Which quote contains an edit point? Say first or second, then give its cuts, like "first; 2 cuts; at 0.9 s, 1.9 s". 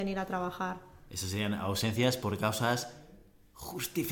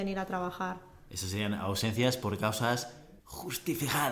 second; 1 cut; at 3.2 s